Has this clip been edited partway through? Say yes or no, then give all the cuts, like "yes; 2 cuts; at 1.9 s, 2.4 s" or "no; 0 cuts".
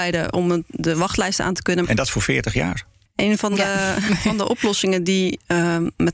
yes; 1 cut; at 1.8 s